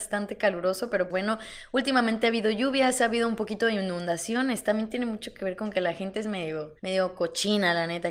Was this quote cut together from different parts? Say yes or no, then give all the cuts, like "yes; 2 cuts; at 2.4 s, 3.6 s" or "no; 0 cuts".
yes; 2 cuts; at 1.1 s, 6.8 s